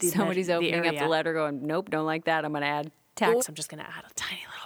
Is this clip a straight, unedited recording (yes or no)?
no